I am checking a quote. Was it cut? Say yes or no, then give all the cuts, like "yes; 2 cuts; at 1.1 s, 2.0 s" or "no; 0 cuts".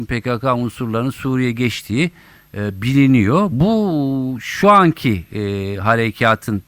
no; 0 cuts